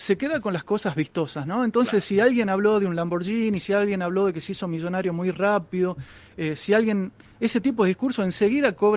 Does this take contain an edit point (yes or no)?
no